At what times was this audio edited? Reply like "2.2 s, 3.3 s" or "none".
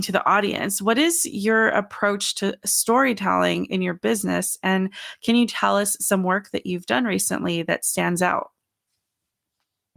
none